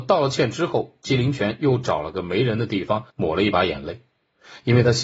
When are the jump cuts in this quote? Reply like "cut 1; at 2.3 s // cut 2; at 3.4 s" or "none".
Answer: cut 1; at 3.1 s